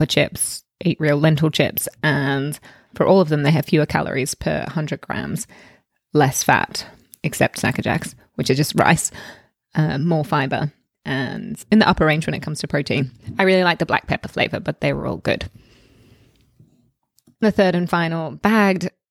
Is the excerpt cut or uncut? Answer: uncut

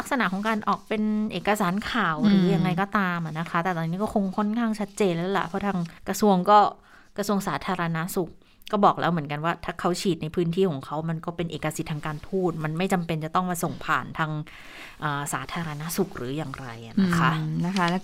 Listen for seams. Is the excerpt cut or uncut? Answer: cut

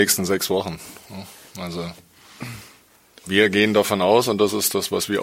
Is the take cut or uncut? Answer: uncut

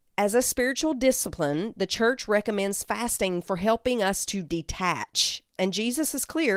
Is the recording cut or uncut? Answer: cut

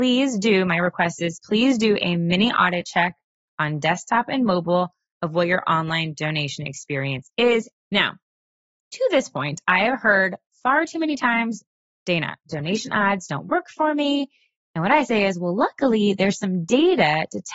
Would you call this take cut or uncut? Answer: cut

